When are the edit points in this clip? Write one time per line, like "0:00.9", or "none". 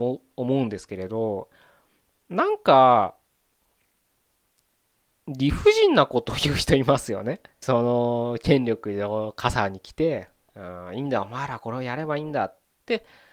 0:07.6